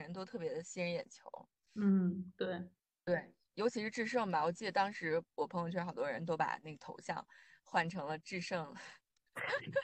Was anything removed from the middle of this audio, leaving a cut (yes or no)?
no